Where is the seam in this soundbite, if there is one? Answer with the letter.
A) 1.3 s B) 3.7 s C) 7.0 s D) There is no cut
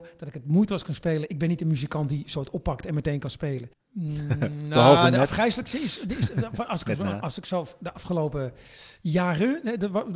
B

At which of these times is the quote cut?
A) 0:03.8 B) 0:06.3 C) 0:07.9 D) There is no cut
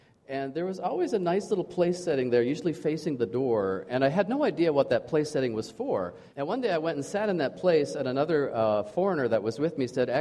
B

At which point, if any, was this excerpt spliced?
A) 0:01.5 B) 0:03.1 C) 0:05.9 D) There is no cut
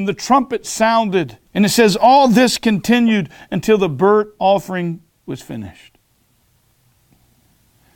A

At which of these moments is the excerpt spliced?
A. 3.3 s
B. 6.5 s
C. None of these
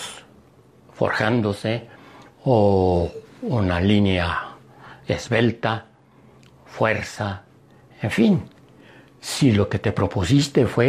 A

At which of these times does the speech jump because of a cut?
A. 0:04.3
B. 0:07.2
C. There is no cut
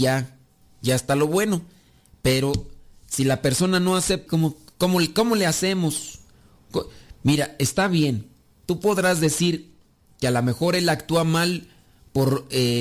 A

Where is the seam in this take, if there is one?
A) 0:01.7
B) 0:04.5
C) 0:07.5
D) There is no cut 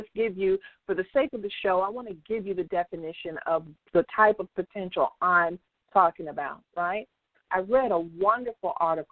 C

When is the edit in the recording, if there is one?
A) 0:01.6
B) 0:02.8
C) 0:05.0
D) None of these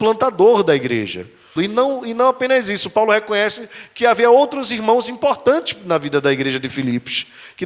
A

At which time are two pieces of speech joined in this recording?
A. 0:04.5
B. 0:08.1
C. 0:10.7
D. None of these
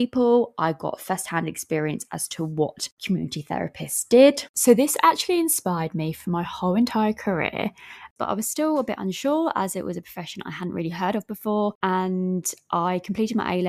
B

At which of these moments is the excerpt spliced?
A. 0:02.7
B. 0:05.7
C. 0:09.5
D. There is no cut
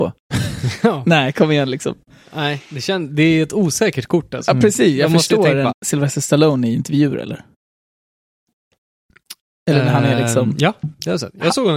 B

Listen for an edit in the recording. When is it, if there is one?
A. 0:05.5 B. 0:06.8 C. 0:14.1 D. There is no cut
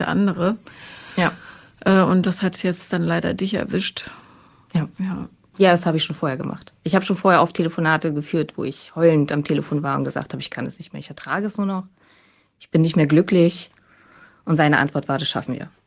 A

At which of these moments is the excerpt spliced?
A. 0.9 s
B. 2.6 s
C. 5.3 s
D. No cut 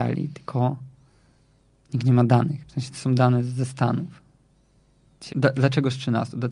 C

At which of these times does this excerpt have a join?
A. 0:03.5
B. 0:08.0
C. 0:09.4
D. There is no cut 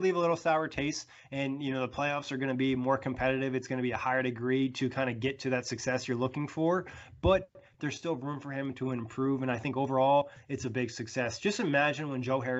D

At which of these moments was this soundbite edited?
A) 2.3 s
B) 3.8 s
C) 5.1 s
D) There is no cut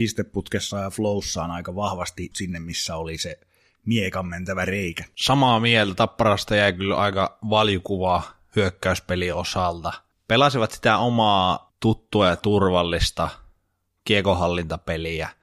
A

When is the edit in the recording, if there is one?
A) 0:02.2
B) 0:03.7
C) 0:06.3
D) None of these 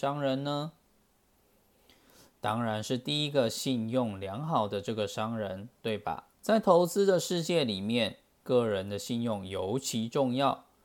C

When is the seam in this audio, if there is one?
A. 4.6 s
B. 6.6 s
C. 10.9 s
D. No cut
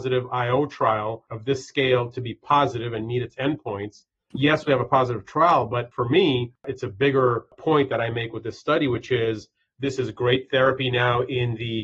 D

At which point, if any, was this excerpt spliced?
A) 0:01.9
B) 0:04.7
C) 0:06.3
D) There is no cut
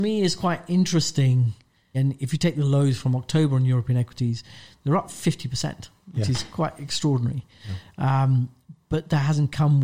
A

